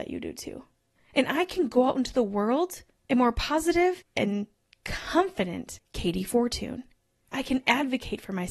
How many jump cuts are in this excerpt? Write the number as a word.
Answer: two